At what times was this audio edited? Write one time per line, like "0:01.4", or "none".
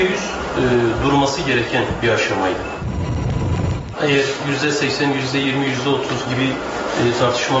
0:03.9